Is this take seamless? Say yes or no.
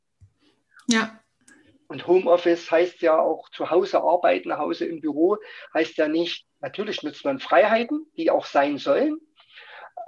no